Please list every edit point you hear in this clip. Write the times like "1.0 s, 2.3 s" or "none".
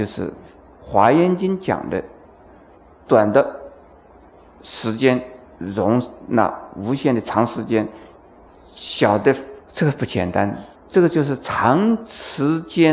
9.6 s, 10.7 s